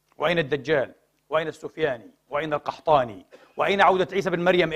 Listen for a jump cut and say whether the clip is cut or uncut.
uncut